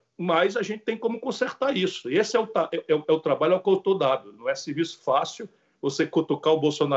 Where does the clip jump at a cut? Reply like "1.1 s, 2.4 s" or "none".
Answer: none